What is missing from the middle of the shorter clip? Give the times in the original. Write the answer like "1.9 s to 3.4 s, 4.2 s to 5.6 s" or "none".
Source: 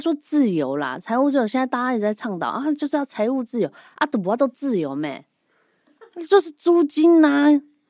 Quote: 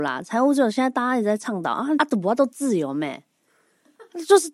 2.7 s to 4.0 s